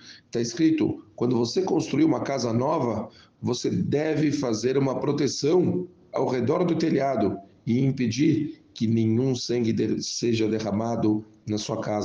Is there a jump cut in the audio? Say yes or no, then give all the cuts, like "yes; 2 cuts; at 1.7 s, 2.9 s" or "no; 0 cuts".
no; 0 cuts